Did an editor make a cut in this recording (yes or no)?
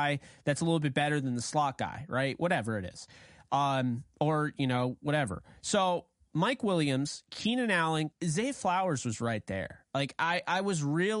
yes